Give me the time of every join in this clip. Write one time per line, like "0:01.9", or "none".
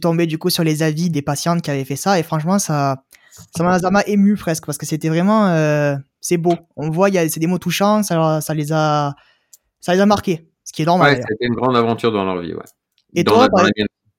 0:01.1